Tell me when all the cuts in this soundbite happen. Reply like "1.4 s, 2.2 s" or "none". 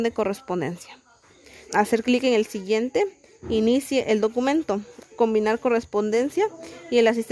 1.7 s